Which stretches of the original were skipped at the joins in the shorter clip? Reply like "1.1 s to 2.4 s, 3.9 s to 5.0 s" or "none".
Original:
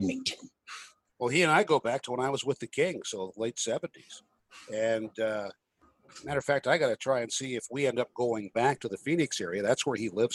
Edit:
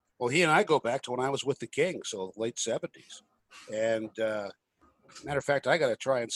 none